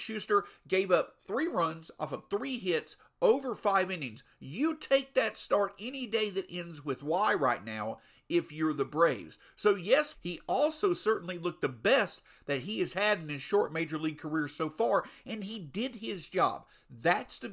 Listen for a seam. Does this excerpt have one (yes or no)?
yes